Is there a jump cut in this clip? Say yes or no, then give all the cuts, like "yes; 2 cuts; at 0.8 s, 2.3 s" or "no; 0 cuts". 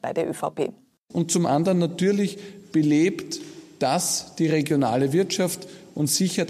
yes; 1 cut; at 1.1 s